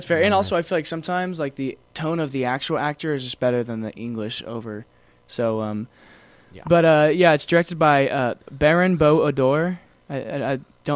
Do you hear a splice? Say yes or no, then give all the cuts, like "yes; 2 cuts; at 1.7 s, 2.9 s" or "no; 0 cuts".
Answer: no; 0 cuts